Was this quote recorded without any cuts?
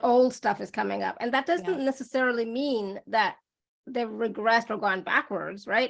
yes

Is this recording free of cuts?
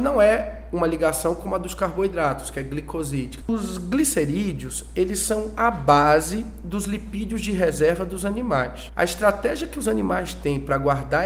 no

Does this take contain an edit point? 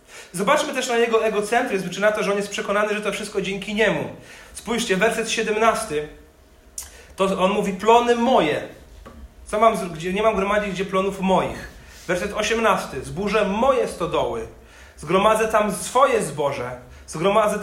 no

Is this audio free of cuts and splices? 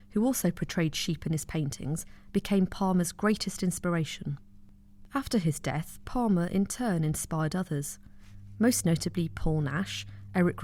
yes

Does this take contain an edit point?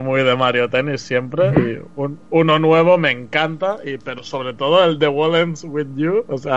no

